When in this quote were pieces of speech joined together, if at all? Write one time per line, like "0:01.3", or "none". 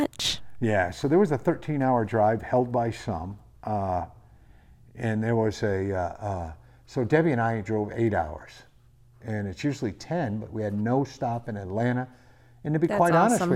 none